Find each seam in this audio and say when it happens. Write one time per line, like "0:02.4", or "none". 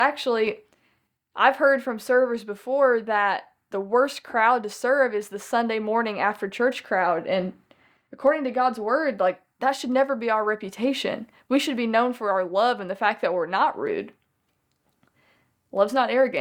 none

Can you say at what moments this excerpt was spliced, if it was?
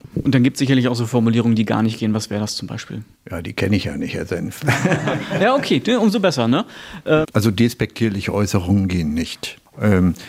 0:07.2

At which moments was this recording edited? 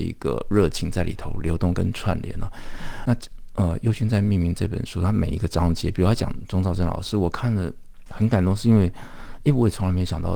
0:03.1

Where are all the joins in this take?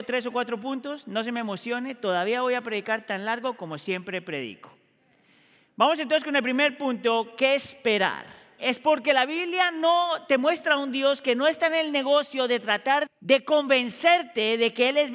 0:08.6
0:13.1

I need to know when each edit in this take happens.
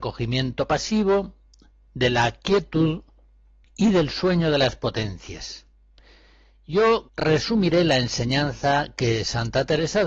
0:07.1

